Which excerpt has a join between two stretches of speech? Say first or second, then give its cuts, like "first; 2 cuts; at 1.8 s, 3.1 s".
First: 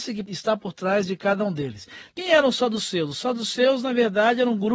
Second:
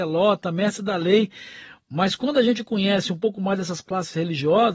first; 1 cut; at 2.1 s